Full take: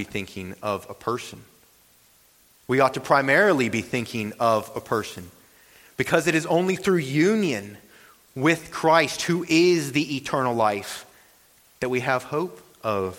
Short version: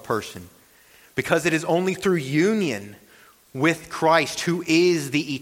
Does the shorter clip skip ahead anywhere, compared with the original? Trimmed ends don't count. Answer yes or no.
no